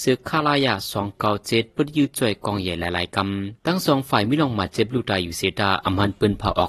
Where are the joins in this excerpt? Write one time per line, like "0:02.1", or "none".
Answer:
0:03.6